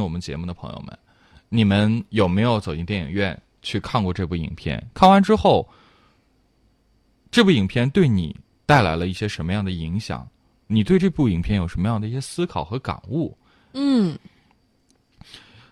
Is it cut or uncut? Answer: cut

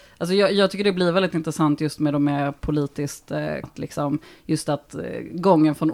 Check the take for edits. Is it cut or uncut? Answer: cut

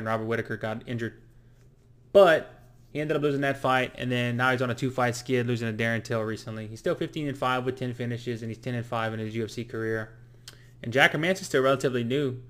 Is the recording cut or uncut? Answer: uncut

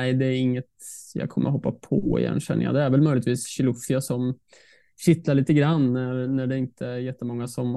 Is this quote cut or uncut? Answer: uncut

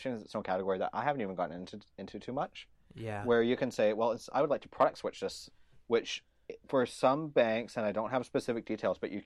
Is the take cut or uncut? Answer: uncut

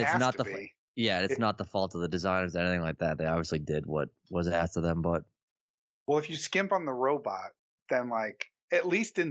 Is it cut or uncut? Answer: uncut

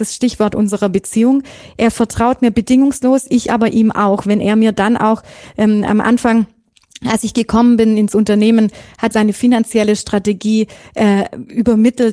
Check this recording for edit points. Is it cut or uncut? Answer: uncut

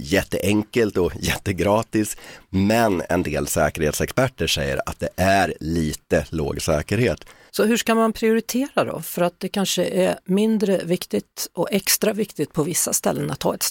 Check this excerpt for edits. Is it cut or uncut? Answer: cut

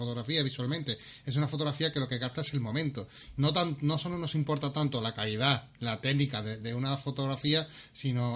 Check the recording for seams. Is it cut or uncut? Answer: uncut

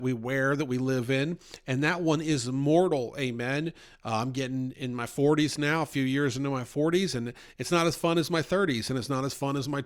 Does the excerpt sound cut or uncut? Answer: uncut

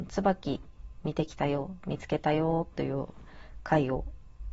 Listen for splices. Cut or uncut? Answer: uncut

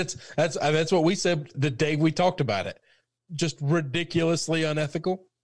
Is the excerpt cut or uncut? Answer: cut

